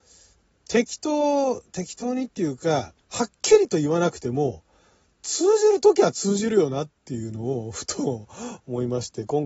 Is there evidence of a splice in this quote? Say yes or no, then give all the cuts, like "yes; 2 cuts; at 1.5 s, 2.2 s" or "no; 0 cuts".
yes; 1 cut; at 3.0 s